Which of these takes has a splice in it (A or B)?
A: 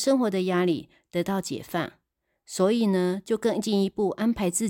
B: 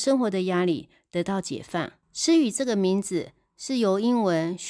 B